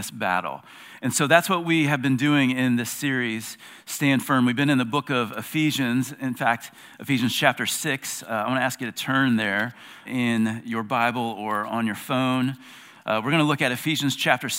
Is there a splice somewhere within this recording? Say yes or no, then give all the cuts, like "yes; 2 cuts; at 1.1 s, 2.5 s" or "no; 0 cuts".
yes; 1 cut; at 10.1 s